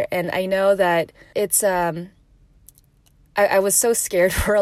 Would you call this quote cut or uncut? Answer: cut